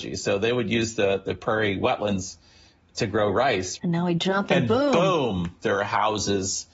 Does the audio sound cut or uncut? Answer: cut